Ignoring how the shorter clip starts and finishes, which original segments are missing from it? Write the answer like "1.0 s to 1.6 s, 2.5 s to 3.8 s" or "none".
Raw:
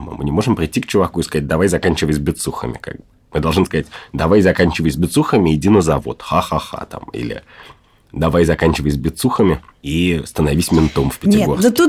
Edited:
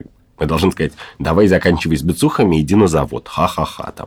none